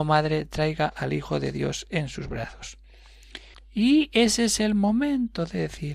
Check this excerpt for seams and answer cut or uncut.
cut